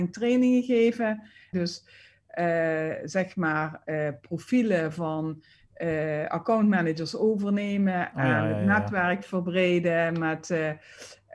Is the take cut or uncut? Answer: cut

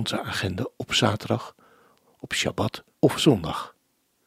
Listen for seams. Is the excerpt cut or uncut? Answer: cut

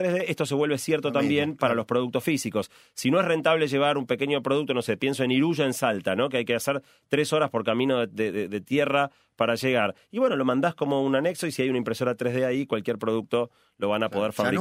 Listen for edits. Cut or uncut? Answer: uncut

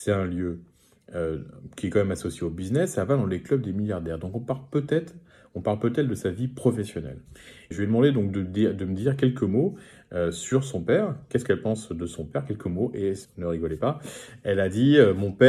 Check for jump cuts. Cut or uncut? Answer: cut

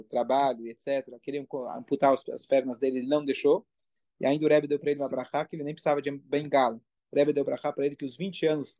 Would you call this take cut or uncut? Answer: cut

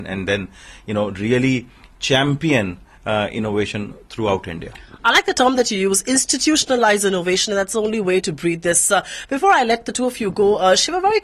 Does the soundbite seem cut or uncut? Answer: uncut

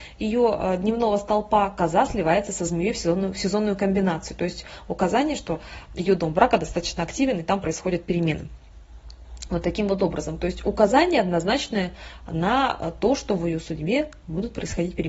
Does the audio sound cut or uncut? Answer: uncut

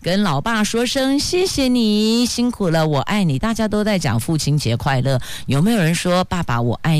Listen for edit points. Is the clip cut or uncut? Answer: uncut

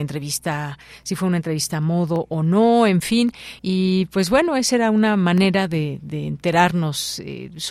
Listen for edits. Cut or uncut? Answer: cut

